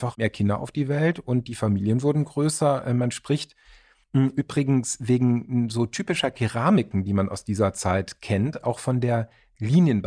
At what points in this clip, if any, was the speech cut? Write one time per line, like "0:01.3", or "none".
none